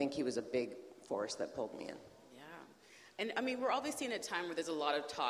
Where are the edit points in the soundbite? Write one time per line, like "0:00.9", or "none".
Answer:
none

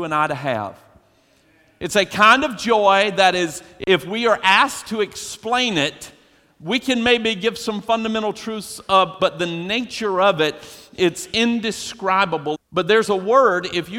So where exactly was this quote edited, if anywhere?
0:09.2
0:12.5

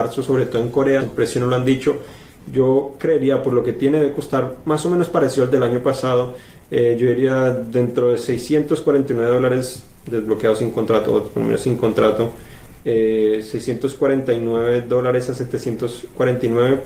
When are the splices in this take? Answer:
0:01.0

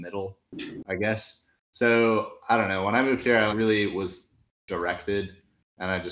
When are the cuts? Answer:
0:03.5

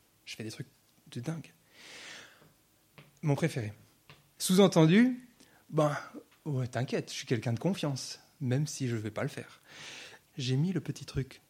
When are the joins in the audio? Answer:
0:04.4
0:10.2

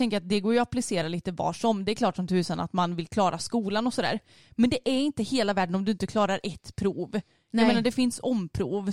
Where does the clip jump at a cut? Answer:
none

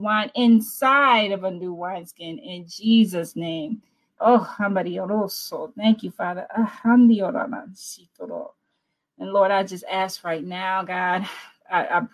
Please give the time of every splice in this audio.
0:04.2

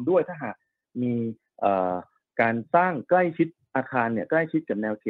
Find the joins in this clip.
0:02.7

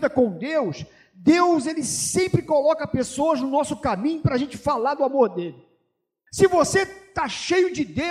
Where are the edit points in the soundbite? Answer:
0:06.3

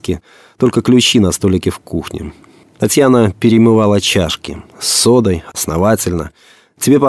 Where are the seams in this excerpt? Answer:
0:02.6

